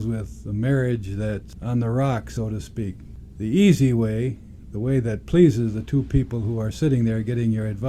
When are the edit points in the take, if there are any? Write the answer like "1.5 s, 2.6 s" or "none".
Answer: none